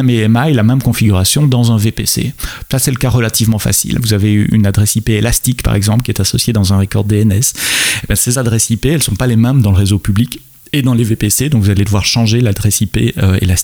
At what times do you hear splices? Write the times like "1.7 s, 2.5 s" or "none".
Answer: 4.0 s